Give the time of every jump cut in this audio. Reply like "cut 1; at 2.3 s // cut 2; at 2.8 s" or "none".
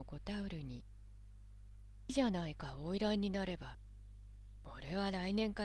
cut 1; at 2.1 s